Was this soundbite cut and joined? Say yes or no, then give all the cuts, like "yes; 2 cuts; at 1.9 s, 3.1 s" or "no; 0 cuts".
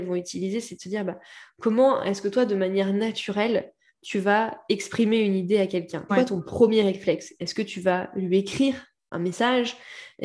yes; 1 cut; at 6.1 s